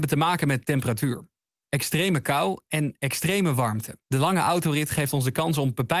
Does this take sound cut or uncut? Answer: cut